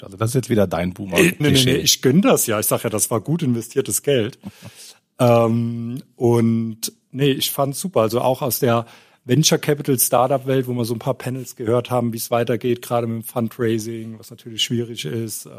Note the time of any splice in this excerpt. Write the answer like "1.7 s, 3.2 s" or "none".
1.4 s, 14.6 s